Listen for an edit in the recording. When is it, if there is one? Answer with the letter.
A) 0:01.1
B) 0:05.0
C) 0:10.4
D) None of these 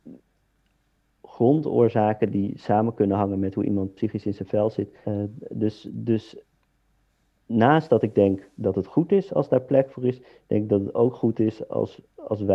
B